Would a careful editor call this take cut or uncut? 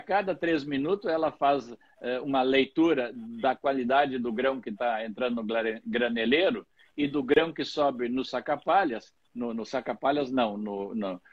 uncut